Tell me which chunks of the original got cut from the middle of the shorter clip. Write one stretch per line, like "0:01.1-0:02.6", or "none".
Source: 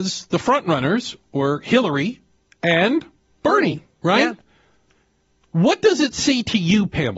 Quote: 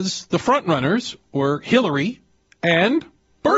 none